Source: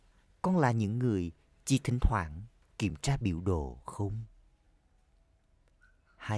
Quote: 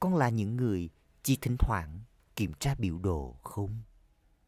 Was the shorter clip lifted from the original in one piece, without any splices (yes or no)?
yes